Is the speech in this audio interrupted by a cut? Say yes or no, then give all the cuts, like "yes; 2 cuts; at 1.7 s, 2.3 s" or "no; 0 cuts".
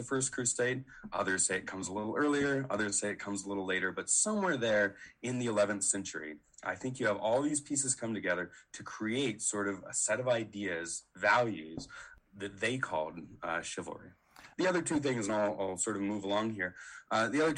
yes; 1 cut; at 14.5 s